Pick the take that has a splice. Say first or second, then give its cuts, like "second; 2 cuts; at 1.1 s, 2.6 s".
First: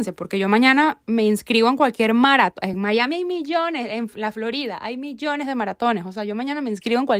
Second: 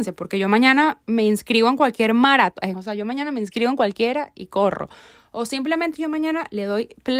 second; 1 cut; at 2.7 s